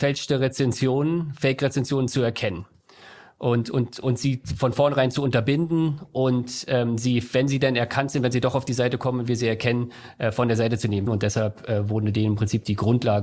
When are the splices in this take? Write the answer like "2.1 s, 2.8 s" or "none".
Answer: 11.1 s

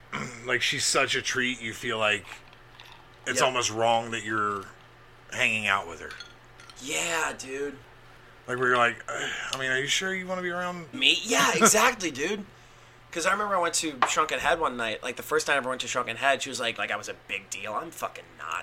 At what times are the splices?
10.9 s, 16.8 s

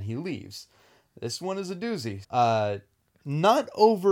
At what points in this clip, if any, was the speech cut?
2.2 s

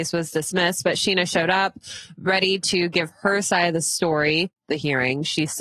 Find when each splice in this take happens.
4.6 s

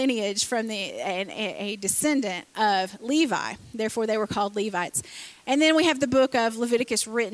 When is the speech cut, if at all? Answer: none

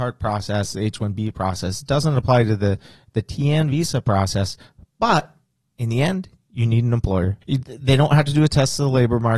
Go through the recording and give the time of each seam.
7.4 s

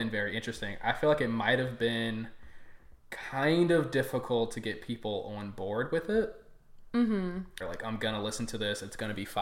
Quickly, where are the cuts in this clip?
7.6 s

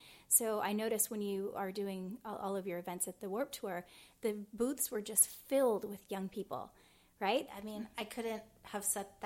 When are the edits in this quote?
3.2 s, 7.5 s

